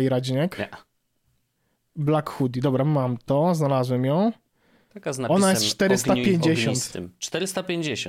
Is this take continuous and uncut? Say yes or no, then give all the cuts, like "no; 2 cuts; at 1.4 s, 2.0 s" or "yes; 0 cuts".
yes; 0 cuts